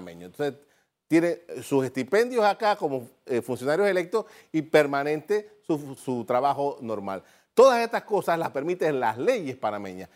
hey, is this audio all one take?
no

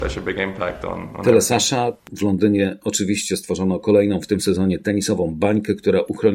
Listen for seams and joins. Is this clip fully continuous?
yes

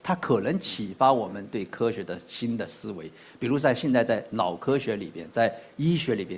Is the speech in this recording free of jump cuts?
yes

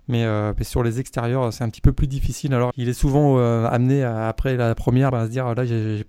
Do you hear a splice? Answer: yes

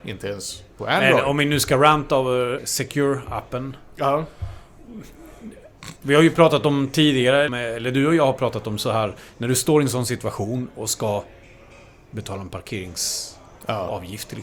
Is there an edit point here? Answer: yes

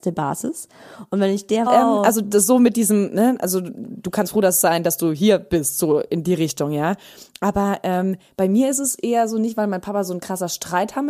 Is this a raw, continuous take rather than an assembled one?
no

